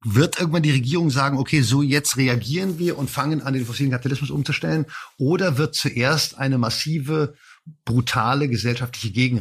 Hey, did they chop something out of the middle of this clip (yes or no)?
no